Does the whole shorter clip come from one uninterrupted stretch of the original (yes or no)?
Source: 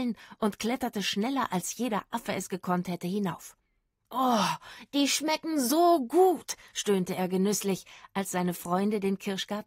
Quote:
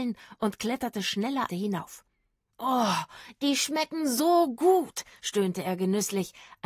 no